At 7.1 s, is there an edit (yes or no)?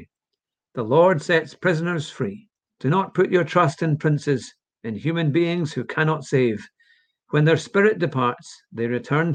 no